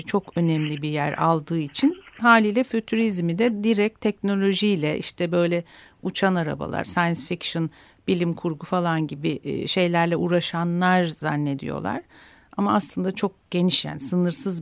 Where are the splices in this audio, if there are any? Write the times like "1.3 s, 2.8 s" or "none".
6.8 s